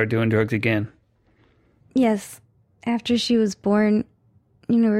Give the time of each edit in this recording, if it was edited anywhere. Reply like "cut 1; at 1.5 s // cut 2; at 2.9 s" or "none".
cut 1; at 1.8 s